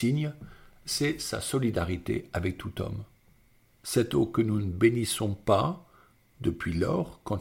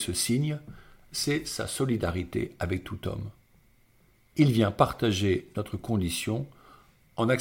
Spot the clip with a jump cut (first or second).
first